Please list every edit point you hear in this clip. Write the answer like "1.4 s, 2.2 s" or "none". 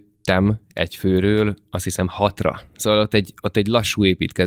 none